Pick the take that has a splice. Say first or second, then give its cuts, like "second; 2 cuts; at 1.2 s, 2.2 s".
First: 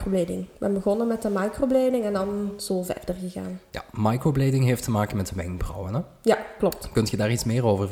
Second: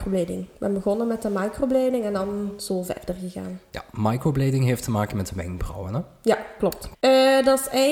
second; 1 cut; at 6.9 s